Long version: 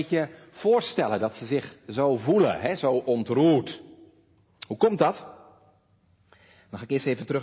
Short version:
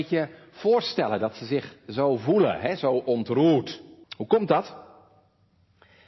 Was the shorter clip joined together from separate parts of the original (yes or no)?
yes